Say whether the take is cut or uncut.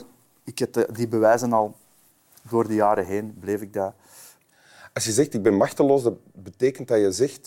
uncut